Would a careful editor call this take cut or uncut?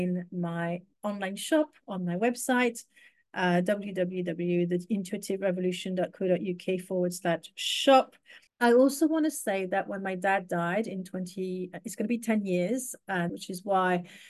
cut